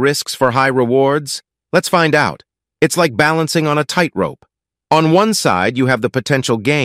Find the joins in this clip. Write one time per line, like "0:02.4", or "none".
0:02.7